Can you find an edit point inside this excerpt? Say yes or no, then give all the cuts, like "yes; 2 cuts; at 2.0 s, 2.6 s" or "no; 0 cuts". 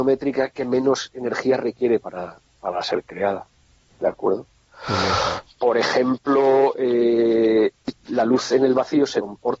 no; 0 cuts